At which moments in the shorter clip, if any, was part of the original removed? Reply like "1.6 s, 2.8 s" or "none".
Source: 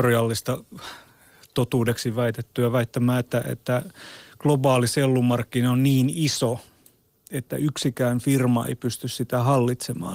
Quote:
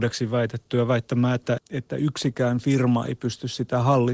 1.6 s